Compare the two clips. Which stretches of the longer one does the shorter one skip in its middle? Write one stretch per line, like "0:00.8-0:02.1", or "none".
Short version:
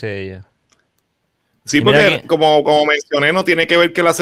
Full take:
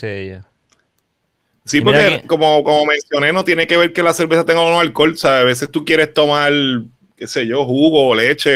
none